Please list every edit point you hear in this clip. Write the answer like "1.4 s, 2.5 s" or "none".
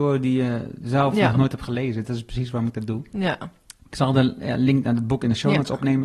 none